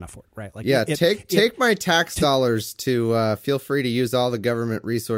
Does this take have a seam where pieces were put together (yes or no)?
no